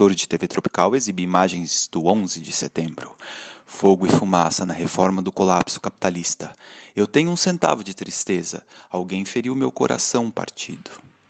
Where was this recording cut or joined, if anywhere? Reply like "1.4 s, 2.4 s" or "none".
none